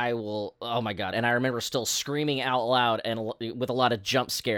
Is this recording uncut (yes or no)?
no